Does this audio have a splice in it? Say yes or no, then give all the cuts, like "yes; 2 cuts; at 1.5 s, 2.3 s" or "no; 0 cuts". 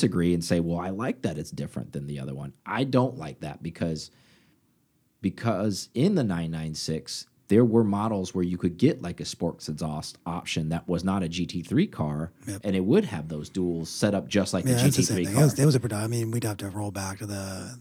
yes; 1 cut; at 2.6 s